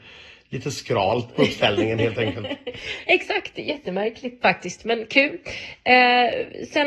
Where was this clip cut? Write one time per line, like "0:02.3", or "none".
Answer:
0:04.4